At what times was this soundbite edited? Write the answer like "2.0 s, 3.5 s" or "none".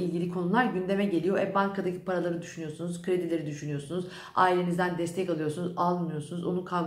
none